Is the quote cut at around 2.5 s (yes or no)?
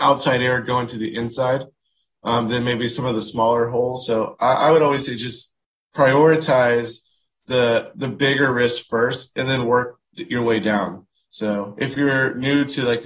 no